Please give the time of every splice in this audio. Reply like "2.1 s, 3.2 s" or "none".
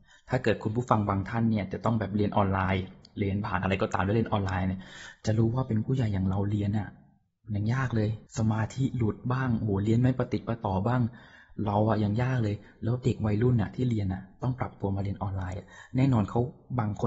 8.3 s